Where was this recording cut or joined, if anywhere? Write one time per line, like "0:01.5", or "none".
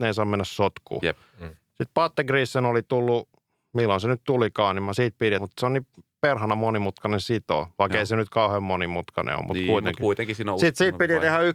0:05.4